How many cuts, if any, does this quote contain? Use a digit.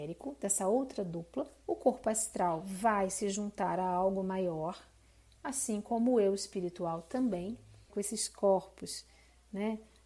2